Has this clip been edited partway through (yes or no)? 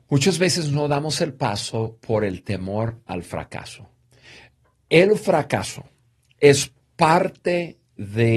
no